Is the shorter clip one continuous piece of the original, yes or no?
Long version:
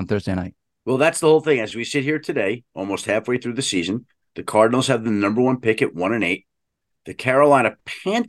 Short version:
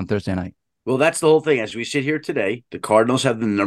no